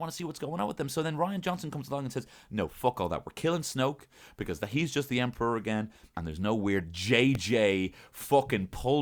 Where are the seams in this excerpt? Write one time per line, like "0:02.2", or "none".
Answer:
0:06.1

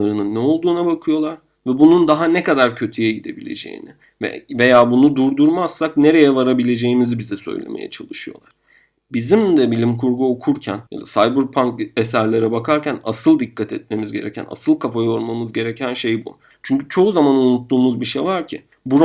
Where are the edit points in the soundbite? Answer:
0:10.9
0:16.5

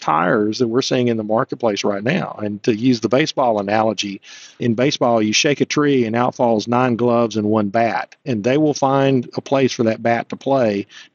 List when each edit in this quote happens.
none

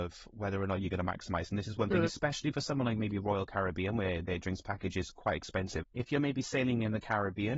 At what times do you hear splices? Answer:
0:05.8

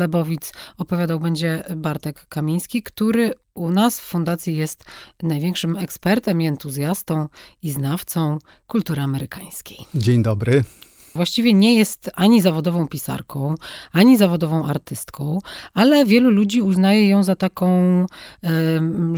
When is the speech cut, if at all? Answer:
0:11.2

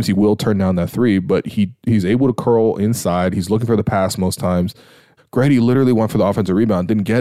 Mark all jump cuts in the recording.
0:05.2

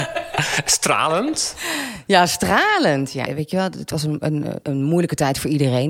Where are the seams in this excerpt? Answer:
0:03.3
0:04.6

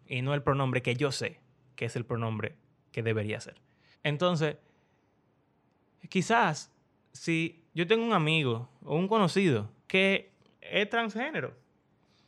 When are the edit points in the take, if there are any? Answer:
0:03.9
0:09.8

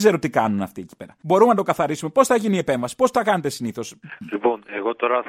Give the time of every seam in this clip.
none

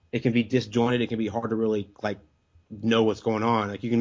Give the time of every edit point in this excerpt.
none

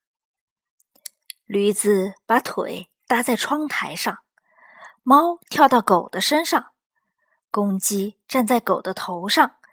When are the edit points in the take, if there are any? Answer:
0:04.9

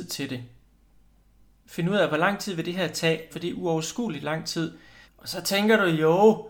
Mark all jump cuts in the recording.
0:03.3
0:05.1

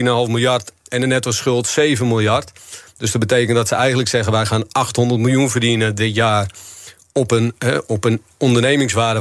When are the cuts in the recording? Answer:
none

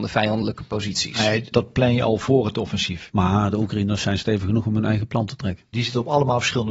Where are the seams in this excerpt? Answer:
0:01.5
0:03.1
0:05.7

